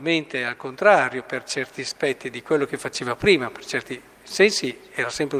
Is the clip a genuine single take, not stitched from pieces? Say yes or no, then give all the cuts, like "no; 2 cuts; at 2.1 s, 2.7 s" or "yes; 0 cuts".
yes; 0 cuts